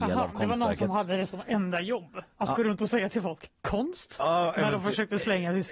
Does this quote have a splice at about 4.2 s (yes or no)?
no